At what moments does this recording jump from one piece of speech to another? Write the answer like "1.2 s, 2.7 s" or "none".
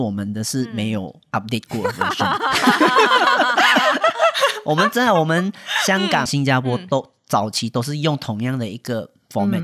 6.3 s